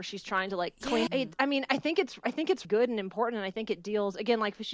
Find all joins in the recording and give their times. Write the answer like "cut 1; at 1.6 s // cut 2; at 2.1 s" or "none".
cut 1; at 1.1 s // cut 2; at 2.6 s